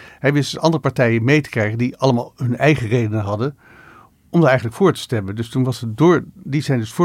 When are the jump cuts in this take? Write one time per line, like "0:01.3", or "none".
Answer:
none

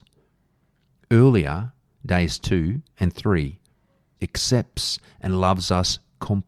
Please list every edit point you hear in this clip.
0:04.2

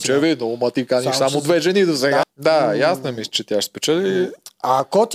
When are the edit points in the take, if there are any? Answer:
0:02.2

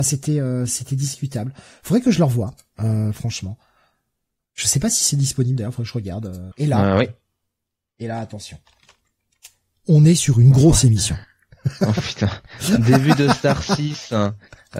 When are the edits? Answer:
0:06.5

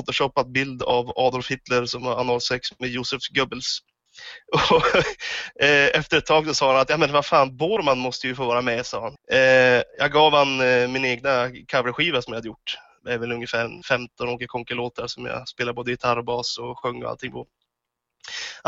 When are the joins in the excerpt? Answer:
0:09.2

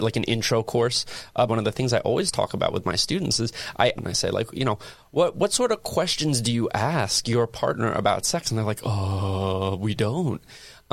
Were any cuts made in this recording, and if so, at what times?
0:01.5
0:04.0

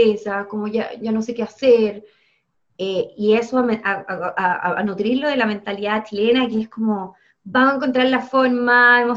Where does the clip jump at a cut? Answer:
none

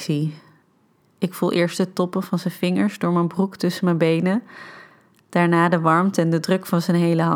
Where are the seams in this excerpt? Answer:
none

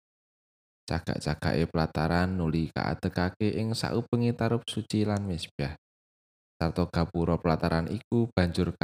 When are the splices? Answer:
none

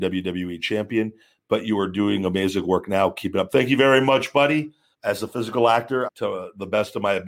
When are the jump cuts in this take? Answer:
0:04.9
0:06.1

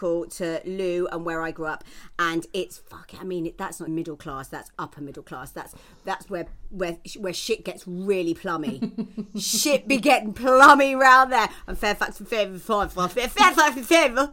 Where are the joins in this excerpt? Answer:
0:03.9
0:13.1

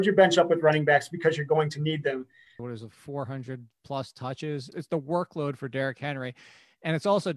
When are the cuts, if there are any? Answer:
0:02.6
0:04.7

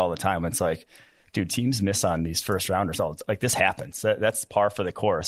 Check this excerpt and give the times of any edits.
none

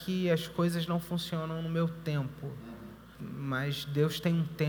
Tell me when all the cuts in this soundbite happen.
0:03.1

